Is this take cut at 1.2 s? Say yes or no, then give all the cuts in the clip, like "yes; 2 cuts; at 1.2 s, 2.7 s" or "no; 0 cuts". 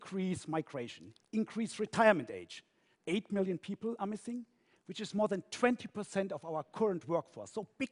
yes; 2 cuts; at 1.2 s, 2.9 s